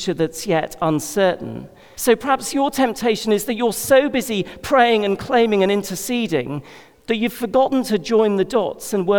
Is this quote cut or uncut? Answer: cut